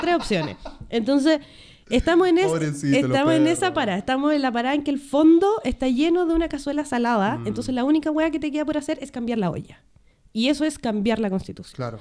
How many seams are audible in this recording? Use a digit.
0